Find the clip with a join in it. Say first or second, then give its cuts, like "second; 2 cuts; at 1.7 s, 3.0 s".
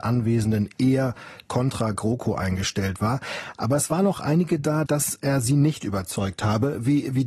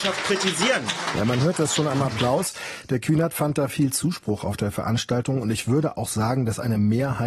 first; 1 cut; at 4.9 s